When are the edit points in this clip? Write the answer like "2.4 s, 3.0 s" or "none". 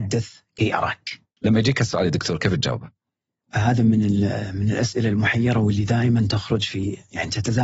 1.4 s